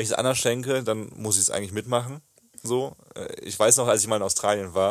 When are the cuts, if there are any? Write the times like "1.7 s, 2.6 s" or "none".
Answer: none